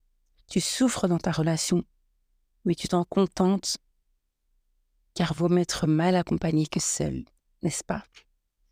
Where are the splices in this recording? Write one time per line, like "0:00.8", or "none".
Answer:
none